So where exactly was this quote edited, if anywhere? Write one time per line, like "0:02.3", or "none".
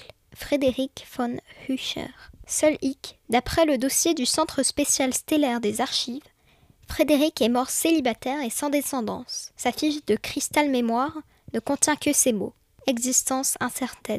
0:09.6